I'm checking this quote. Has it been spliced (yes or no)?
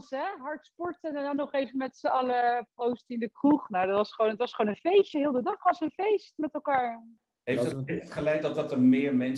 no